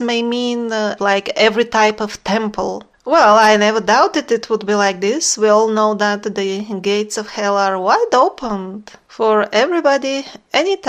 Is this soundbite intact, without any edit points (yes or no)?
no